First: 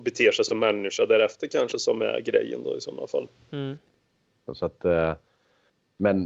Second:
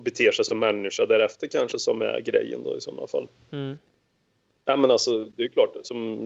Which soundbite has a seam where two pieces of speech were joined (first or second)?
first